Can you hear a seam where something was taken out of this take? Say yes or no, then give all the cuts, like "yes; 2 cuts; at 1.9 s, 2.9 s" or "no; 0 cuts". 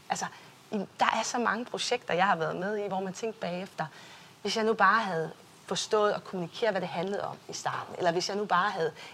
no; 0 cuts